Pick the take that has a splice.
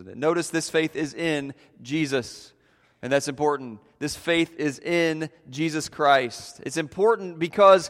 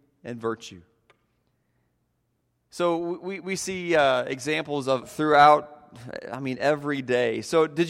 second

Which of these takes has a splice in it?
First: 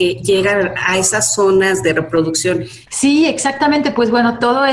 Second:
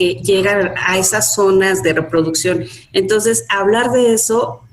first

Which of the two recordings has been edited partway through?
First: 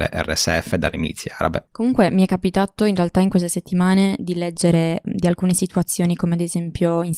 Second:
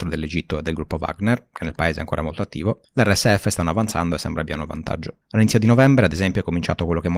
first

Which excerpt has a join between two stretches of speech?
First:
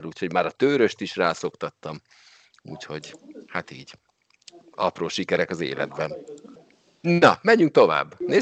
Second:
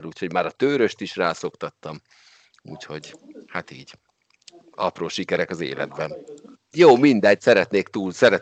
second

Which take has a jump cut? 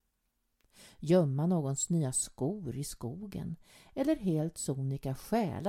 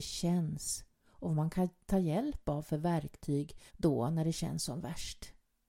second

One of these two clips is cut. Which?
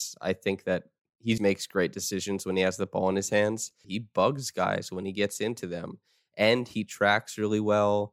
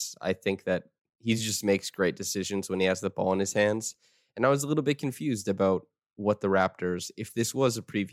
first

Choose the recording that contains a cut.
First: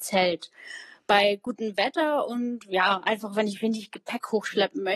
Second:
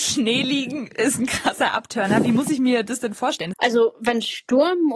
second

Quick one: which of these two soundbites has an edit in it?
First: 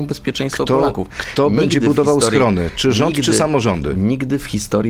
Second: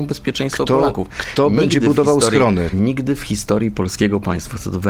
second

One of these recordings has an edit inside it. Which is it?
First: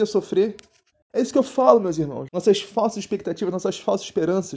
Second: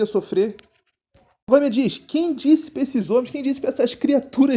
first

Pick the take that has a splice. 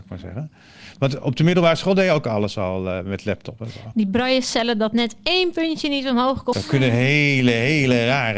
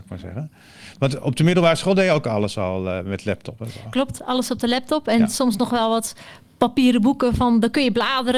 first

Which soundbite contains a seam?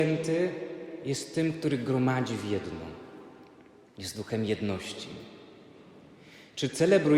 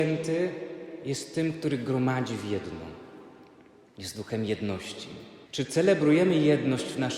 second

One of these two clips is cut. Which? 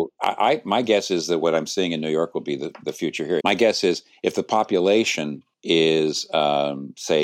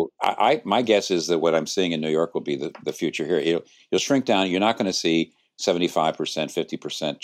first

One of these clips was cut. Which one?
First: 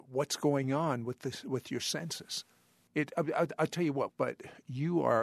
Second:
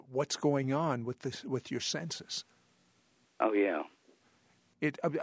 first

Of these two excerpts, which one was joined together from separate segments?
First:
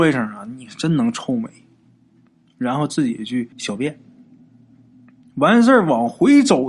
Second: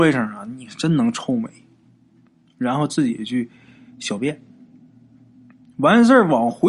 first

